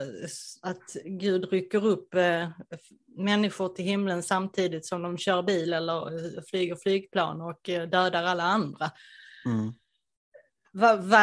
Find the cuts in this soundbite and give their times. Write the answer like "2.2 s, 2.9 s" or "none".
none